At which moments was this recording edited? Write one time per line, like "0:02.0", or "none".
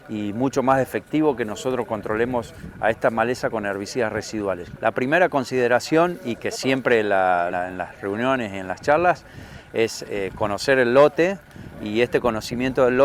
0:04.8
0:07.5